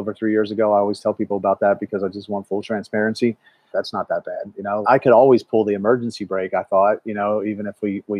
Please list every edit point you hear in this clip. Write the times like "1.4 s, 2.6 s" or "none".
3.7 s, 4.8 s

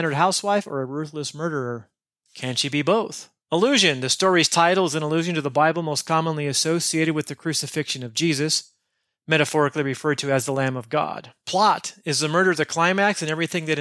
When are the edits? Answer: none

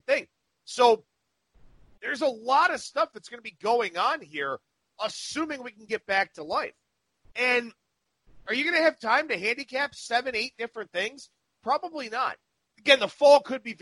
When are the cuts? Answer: 12.7 s

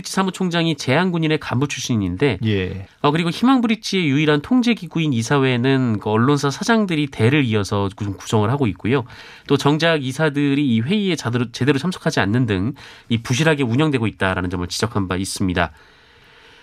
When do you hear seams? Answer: 2.9 s

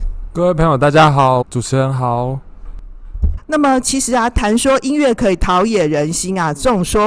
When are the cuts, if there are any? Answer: 1.4 s, 3.4 s

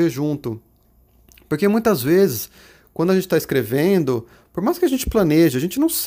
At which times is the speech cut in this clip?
none

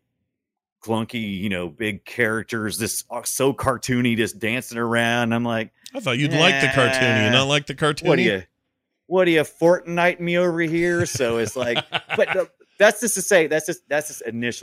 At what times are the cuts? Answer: none

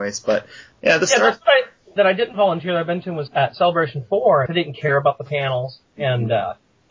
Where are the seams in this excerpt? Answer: 2.0 s, 3.3 s, 4.5 s

